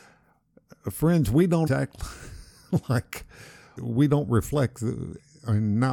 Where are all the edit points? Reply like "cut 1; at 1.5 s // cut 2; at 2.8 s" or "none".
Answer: cut 1; at 1.7 s // cut 2; at 3.8 s